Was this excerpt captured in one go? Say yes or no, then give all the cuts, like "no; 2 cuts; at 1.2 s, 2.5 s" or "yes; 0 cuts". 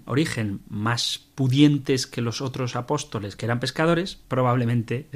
no; 1 cut; at 4.2 s